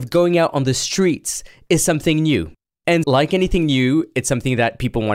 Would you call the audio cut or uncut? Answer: cut